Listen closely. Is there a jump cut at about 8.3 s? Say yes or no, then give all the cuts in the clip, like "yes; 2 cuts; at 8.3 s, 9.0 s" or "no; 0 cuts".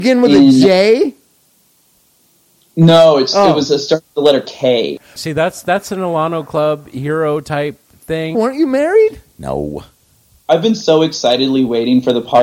yes; 2 cuts; at 5.2 s, 8.3 s